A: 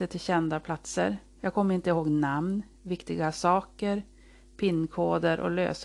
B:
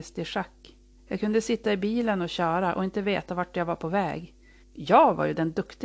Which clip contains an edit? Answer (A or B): B